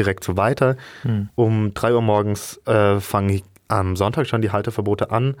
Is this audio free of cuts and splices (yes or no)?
yes